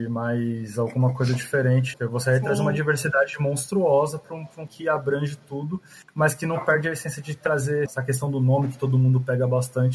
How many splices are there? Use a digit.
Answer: 3